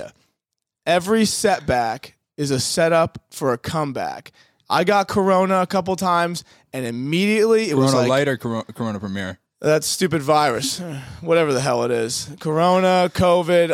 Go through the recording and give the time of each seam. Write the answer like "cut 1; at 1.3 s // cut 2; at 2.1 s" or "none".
none

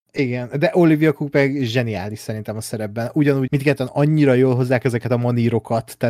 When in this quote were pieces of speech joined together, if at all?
cut 1; at 3.5 s

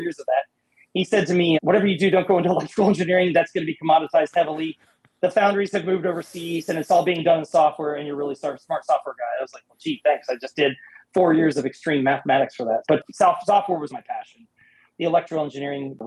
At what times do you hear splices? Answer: cut 1; at 12.8 s // cut 2; at 13.9 s

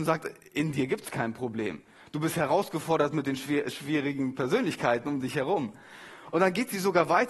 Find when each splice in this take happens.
none

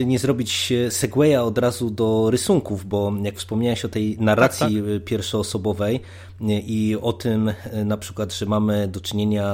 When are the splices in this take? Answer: none

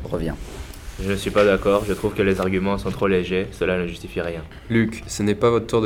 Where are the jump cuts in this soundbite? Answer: none

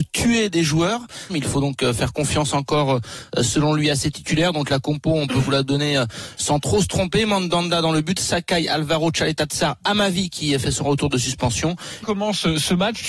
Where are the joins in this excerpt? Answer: cut 1; at 1.3 s // cut 2; at 12.0 s

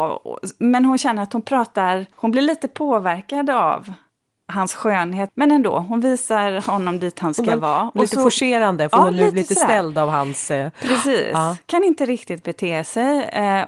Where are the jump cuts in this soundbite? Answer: cut 1; at 2.1 s // cut 2; at 5.3 s

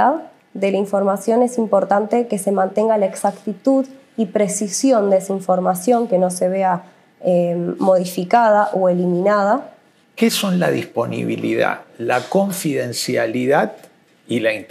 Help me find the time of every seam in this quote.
cut 1; at 10.0 s

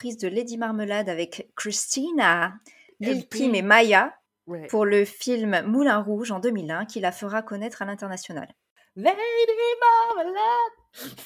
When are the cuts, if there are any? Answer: none

